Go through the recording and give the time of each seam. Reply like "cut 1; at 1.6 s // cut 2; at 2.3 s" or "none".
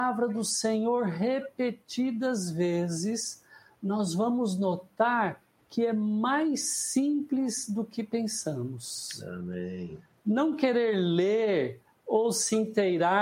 none